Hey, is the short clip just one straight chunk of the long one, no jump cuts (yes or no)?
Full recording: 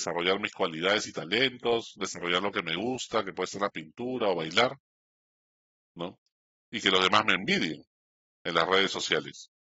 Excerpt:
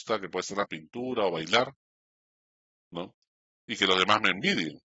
yes